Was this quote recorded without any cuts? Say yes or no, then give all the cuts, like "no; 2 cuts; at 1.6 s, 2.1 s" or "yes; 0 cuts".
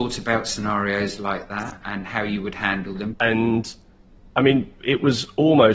no; 2 cuts; at 1.8 s, 3.1 s